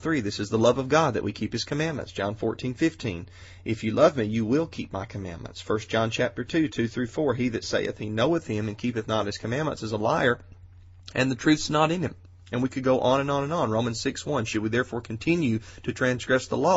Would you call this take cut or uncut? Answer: uncut